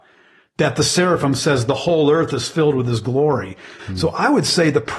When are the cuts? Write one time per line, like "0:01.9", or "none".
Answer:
0:03.8